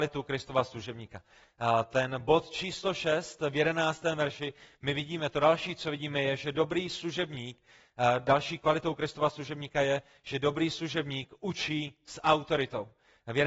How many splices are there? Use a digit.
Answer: 0